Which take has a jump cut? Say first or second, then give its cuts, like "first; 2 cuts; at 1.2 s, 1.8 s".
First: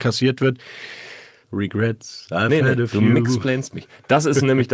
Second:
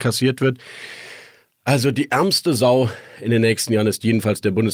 first; 1 cut; at 1.4 s